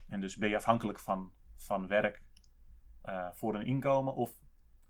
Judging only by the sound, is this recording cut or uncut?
uncut